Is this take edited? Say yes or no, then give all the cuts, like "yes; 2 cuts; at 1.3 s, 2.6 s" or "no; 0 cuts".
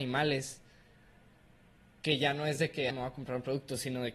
yes; 1 cut; at 2.9 s